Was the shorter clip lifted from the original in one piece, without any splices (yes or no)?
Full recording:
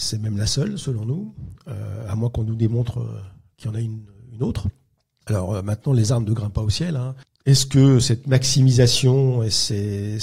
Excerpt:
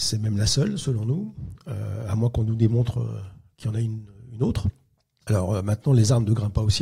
yes